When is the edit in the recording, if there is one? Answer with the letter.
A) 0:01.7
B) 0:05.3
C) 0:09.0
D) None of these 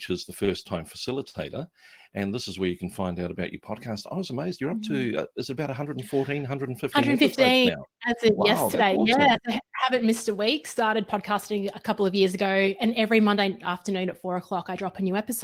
D